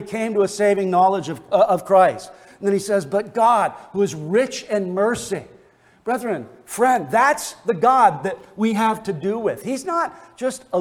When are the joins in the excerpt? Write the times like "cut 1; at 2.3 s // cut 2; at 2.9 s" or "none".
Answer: none